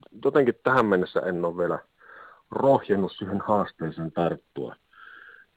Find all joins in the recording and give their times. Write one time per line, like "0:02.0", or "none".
none